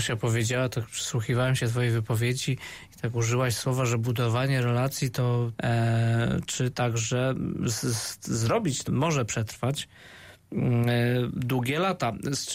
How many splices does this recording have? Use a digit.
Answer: 2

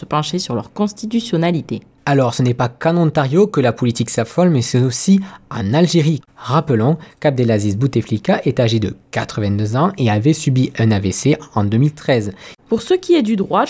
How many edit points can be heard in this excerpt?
2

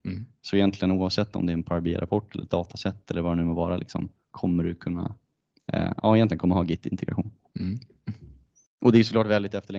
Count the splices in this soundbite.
0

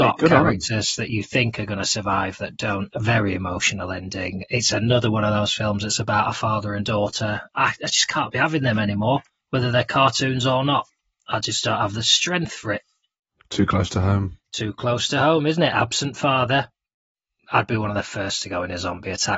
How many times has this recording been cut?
0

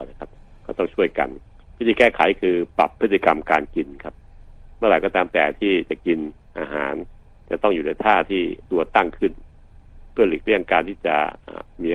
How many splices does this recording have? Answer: 1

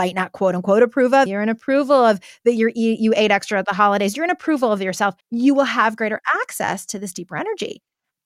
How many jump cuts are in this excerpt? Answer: 2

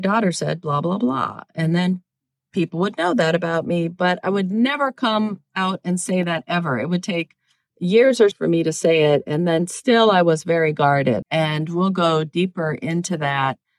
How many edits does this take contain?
2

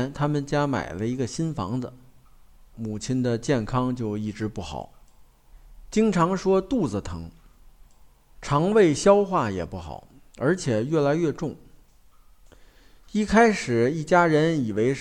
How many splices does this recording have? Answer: 1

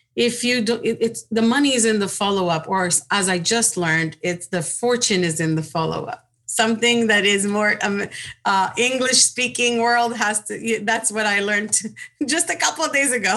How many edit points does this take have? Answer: 0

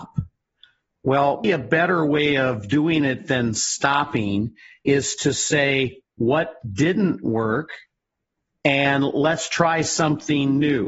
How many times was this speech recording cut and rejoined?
1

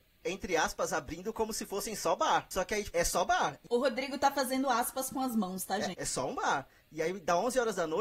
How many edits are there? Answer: 2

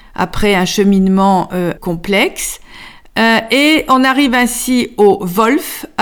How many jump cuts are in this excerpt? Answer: 1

